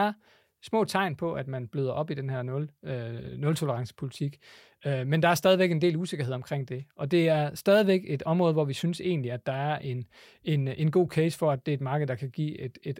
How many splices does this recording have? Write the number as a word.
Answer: zero